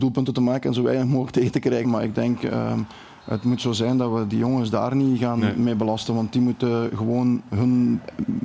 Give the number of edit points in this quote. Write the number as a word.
one